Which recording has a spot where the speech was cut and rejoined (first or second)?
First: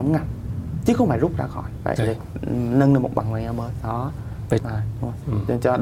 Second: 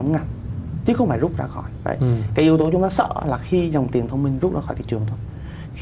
first